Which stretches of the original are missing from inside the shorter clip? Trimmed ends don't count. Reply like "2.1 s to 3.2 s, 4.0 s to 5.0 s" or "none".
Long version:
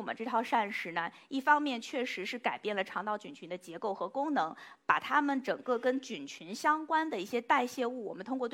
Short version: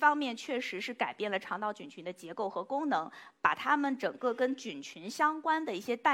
none